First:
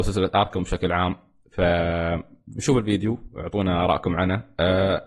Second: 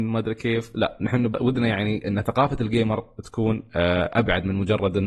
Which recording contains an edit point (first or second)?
second